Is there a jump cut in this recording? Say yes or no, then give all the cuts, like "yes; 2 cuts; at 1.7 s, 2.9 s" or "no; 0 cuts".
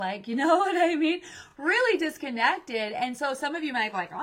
no; 0 cuts